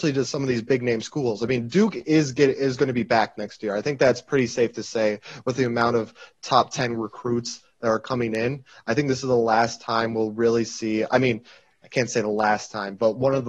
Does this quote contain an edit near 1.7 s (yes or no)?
no